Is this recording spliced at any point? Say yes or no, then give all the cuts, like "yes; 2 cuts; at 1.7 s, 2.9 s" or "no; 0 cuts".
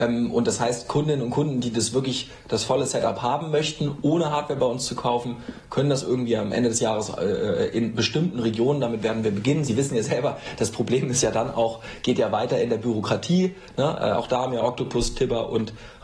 no; 0 cuts